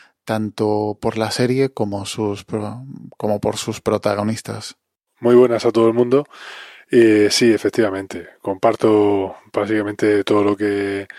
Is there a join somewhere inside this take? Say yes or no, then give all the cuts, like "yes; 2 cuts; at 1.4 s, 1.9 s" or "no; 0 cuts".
no; 0 cuts